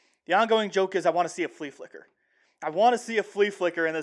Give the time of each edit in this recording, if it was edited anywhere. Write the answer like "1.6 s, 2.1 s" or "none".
none